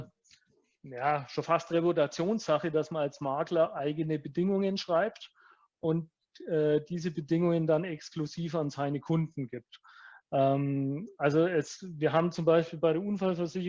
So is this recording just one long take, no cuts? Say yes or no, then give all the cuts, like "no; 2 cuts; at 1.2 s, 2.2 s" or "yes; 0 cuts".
yes; 0 cuts